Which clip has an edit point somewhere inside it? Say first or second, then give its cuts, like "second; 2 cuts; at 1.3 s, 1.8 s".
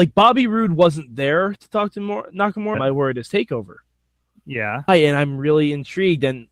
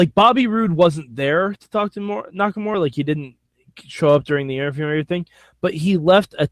first; 2 cuts; at 2.7 s, 4.9 s